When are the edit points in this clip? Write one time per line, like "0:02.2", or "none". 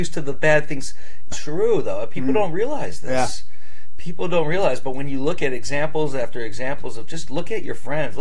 0:01.3